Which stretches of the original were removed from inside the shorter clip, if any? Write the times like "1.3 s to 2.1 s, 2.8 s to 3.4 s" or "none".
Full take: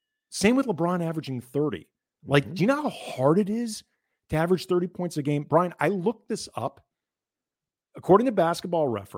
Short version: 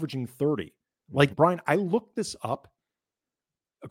2.5 s to 5.4 s